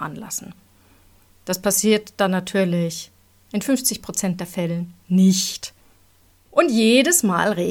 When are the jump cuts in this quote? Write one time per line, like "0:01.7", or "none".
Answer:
none